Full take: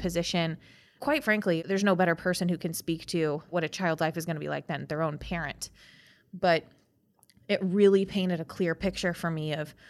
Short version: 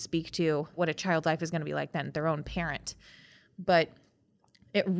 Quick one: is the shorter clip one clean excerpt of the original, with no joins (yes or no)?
yes